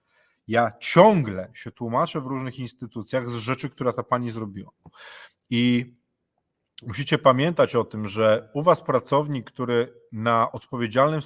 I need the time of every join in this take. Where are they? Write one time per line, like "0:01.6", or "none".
none